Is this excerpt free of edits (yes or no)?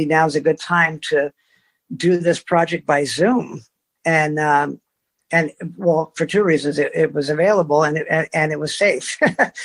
yes